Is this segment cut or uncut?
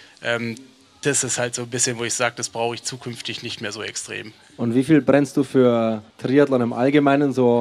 cut